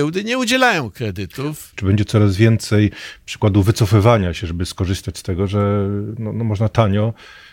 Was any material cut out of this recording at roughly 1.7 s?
yes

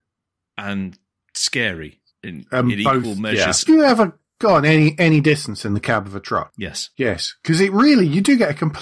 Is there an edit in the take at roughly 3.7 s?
yes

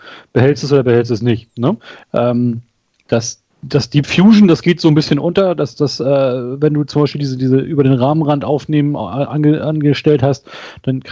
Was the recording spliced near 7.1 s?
no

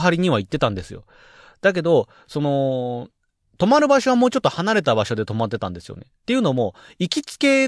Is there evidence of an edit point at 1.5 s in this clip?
no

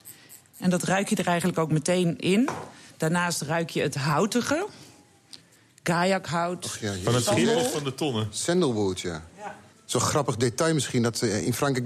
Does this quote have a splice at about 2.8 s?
no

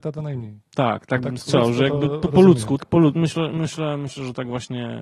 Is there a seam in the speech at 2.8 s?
yes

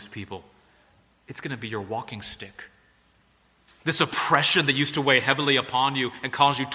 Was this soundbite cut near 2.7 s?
no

